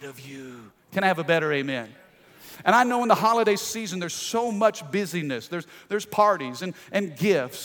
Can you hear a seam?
no; 0 cuts

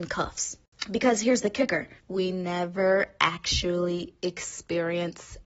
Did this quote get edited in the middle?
yes; 1 cut; at 2.0 s

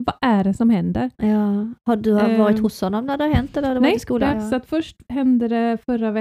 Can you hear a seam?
yes; 1 cut; at 4.3 s

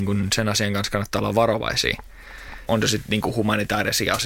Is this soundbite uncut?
no; 1 cut; at 2.7 s

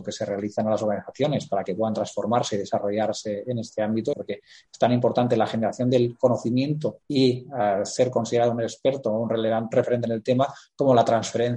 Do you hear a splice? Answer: yes; 3 cuts; at 4.1 s, 7.0 s, 9.7 s

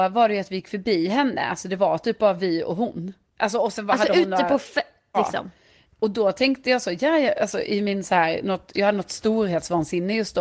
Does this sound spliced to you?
yes; 1 cut; at 5.1 s

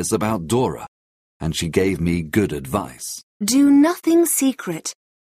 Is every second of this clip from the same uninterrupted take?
no; 1 cut; at 3.3 s

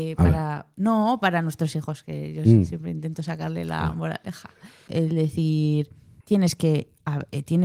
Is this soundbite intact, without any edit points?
no; 2 cuts; at 4.9 s, 6.2 s

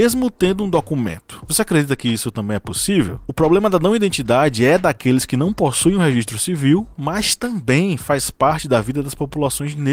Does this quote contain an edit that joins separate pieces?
no; 0 cuts

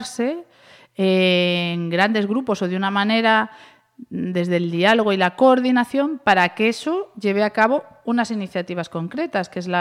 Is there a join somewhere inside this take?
no; 0 cuts

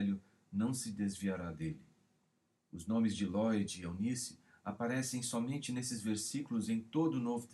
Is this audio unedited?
no; 1 cut; at 2.6 s

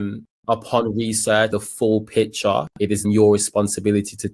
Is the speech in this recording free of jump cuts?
no; 2 cuts; at 1.5 s, 3.0 s

